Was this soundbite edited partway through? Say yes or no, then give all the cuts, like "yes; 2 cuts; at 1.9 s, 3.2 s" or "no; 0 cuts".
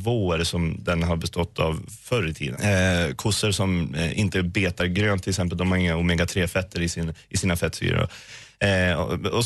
yes; 1 cut; at 2.5 s